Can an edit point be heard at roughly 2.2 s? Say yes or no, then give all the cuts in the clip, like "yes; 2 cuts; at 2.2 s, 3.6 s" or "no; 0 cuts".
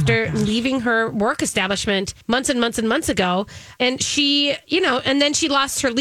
yes; 2 cuts; at 2.2 s, 3.8 s